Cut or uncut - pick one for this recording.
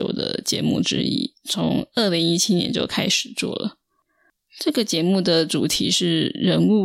uncut